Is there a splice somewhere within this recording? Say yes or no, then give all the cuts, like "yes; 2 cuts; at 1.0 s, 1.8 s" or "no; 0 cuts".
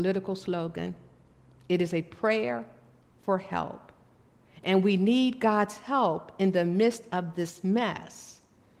no; 0 cuts